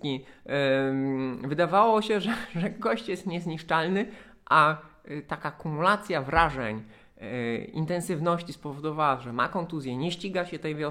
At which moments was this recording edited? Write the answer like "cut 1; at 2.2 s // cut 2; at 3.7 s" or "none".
none